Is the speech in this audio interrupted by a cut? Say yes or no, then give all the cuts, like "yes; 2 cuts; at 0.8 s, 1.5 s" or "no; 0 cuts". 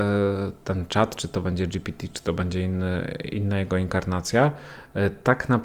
no; 0 cuts